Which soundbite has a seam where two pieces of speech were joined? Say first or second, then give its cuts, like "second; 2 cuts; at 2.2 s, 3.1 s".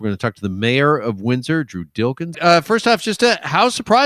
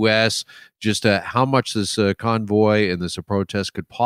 first; 1 cut; at 2.3 s